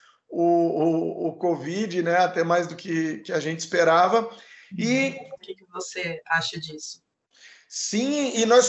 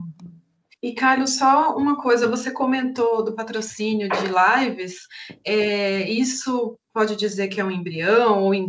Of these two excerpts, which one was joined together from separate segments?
first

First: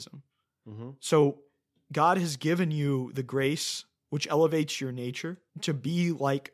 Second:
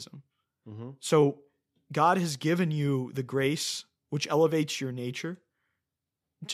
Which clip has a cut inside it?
first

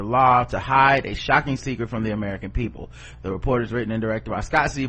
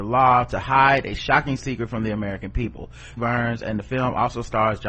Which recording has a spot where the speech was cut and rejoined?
second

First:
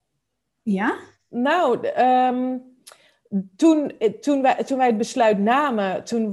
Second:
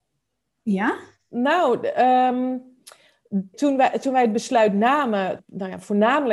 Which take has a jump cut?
second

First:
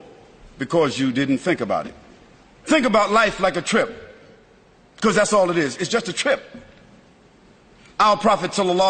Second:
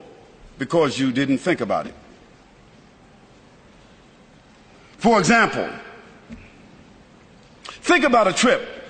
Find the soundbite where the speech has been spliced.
first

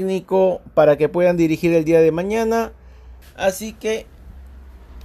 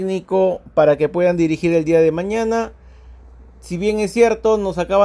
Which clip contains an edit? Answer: first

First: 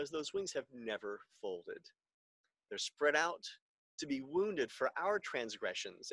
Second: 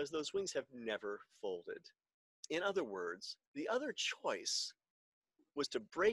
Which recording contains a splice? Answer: second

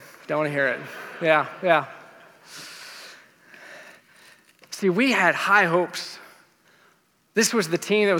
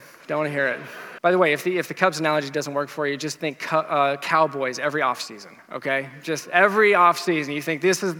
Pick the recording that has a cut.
second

